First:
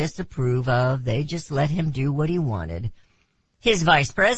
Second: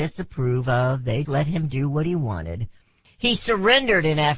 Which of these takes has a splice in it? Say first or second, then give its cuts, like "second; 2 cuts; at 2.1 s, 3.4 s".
second; 2 cuts; at 1.2 s, 3.0 s